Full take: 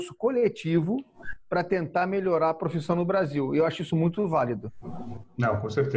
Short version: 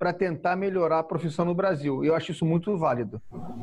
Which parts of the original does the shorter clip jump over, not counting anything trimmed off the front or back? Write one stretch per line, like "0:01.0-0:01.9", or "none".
none